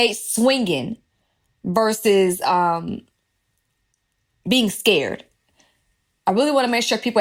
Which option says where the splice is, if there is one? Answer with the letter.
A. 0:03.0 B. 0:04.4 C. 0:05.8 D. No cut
D